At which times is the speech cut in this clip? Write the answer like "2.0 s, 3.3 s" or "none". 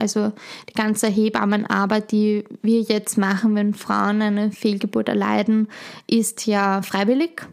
none